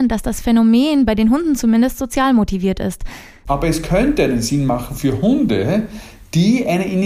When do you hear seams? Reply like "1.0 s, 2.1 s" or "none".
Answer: 3.5 s